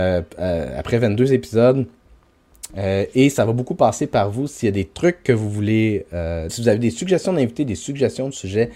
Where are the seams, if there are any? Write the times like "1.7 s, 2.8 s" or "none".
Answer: 2.7 s, 6.5 s